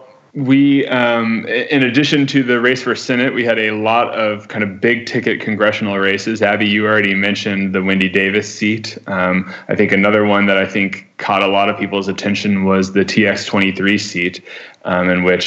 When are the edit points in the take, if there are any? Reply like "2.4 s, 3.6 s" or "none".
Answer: none